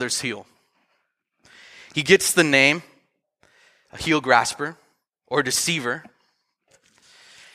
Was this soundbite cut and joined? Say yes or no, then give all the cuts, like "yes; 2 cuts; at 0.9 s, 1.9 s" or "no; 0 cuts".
no; 0 cuts